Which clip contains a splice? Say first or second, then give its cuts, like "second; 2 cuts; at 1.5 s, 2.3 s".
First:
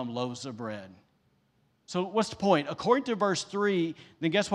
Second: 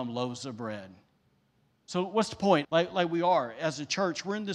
second; 1 cut; at 2.6 s